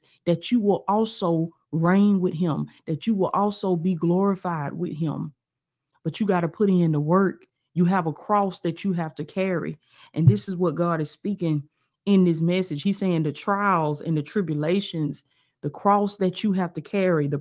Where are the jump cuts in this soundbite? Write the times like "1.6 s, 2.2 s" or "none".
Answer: none